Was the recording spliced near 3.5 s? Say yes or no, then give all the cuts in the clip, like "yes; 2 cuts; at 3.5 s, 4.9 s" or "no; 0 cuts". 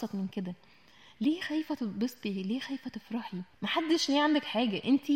yes; 1 cut; at 3.5 s